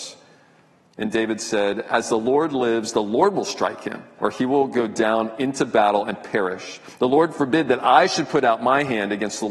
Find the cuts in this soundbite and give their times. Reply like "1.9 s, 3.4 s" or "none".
4.2 s